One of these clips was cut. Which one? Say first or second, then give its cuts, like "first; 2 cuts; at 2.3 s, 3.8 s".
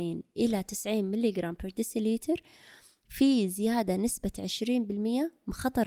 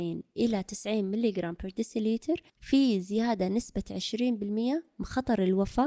second; 1 cut; at 2.5 s